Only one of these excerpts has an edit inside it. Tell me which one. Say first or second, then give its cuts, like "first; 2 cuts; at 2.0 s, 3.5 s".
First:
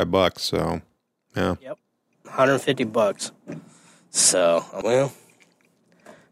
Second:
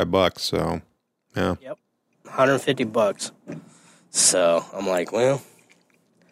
first; 1 cut; at 4.8 s